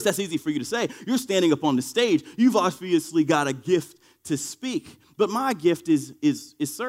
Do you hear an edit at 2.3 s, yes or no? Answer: no